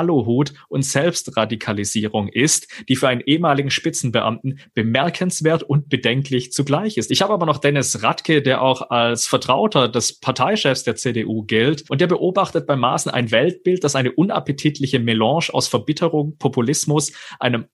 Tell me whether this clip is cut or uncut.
cut